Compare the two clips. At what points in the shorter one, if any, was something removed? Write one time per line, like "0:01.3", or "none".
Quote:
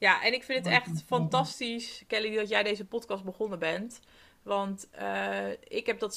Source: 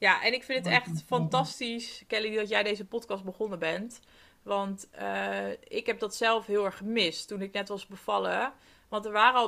none